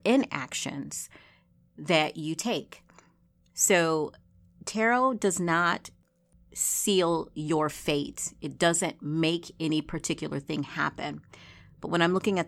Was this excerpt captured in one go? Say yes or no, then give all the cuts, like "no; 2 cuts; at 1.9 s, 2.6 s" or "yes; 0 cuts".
yes; 0 cuts